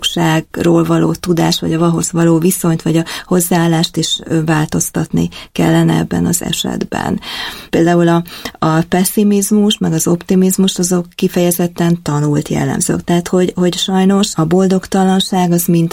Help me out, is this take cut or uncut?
cut